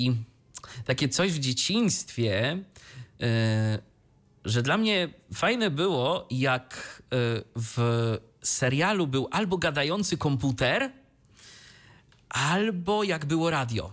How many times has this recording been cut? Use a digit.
0